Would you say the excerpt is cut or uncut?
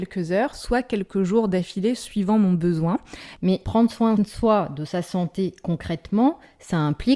cut